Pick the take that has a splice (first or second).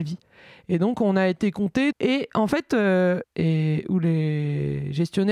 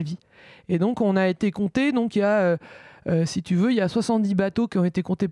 first